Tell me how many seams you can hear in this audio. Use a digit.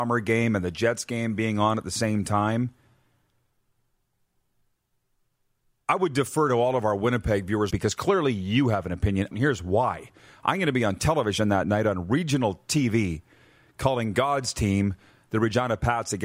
2